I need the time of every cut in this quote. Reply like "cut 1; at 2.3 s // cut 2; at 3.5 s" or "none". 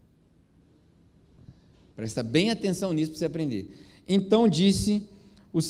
cut 1; at 1.9 s